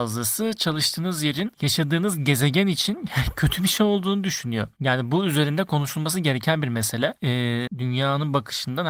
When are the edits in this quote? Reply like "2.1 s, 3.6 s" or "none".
7.7 s